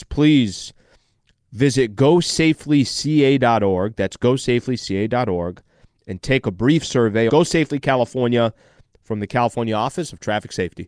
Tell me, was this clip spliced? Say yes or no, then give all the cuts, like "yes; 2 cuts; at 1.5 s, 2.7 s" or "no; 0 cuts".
yes; 1 cut; at 7.3 s